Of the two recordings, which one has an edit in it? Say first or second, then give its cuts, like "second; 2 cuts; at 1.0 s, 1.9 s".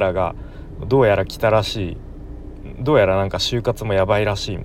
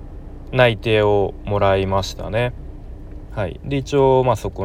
second; 1 cut; at 3.3 s